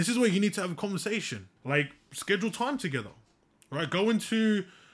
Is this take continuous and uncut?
no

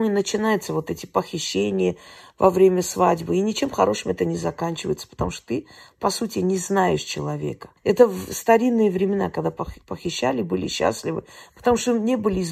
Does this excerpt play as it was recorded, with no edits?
no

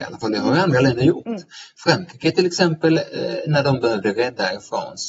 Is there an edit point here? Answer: no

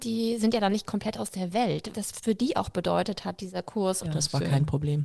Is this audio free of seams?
no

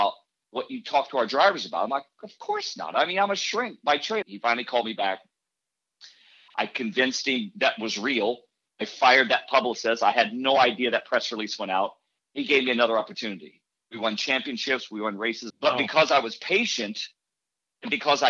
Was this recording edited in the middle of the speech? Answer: yes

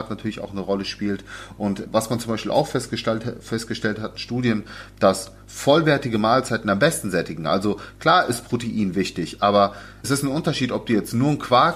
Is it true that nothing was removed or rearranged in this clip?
yes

